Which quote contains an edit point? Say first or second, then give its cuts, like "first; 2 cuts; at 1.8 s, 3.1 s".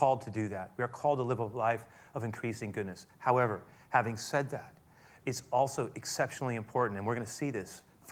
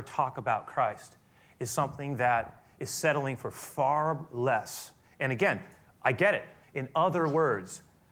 second; 1 cut; at 6.6 s